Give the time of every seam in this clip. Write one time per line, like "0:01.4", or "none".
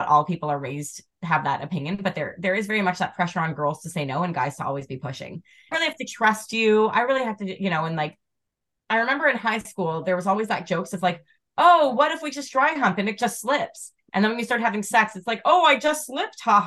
0:05.7